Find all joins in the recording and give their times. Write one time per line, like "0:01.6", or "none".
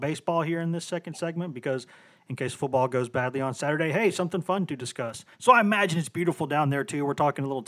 0:05.3